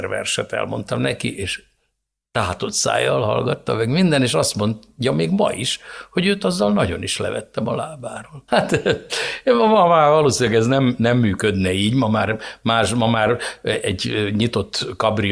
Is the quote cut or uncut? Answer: cut